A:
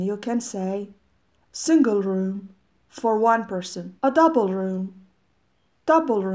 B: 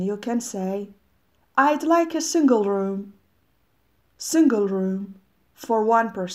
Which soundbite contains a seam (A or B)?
A